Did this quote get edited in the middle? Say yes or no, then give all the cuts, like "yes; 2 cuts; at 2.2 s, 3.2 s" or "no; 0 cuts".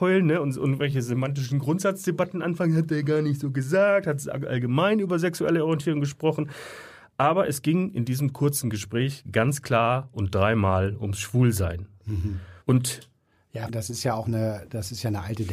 yes; 2 cuts; at 12.6 s, 13.7 s